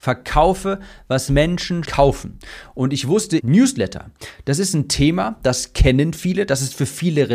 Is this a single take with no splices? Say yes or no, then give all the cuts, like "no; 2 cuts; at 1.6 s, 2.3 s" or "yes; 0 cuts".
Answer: no; 2 cuts; at 1.8 s, 3.4 s